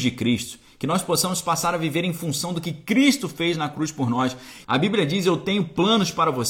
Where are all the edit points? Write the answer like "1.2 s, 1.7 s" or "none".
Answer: 4.6 s